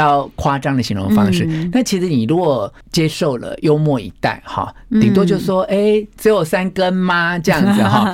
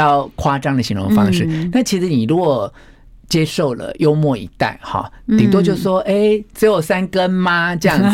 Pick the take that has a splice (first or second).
first